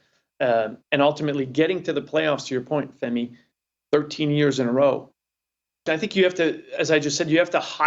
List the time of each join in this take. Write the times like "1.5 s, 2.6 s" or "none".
5.9 s